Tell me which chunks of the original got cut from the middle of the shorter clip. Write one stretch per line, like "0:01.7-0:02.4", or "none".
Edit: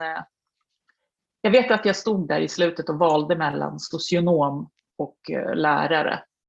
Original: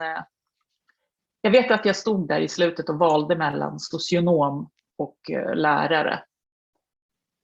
none